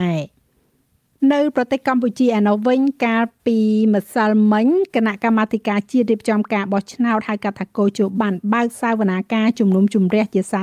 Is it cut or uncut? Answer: cut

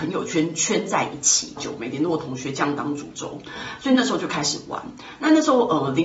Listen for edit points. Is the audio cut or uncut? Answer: cut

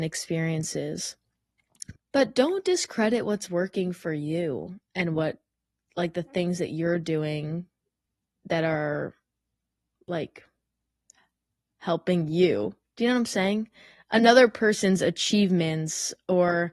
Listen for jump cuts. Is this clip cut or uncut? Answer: cut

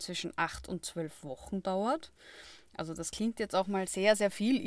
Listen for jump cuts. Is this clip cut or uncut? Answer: uncut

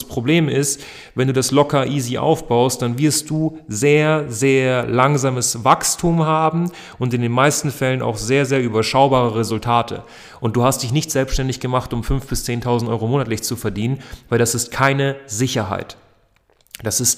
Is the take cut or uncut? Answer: uncut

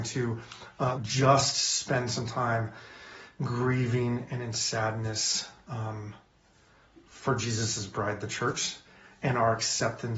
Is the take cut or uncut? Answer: cut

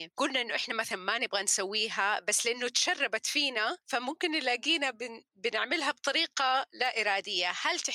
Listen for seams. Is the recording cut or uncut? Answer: uncut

